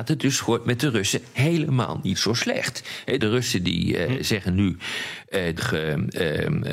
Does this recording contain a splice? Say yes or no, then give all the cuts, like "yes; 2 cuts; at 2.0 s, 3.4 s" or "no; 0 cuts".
yes; 2 cuts; at 3.2 s, 5.6 s